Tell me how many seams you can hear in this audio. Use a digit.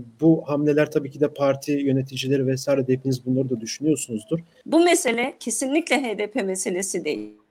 1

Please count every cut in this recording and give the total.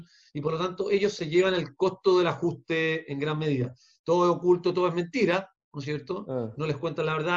1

